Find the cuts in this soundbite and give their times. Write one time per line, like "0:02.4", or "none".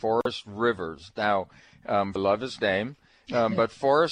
0:02.2